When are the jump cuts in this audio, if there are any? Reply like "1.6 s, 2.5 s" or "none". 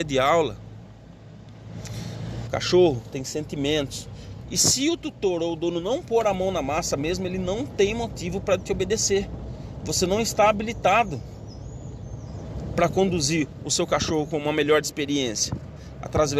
2.5 s, 4.4 s